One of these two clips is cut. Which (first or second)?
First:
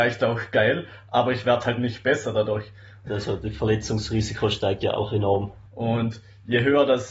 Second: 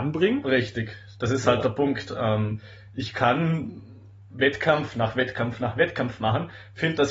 first